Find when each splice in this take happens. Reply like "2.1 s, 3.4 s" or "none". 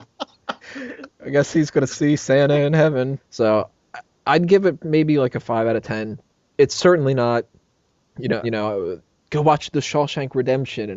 3.2 s, 8.4 s